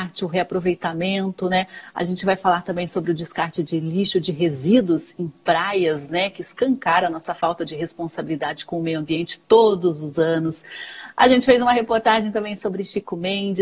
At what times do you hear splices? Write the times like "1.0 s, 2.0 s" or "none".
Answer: none